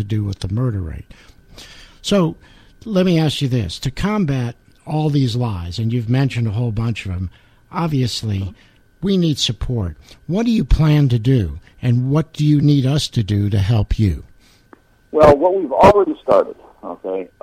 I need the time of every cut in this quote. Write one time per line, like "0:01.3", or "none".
none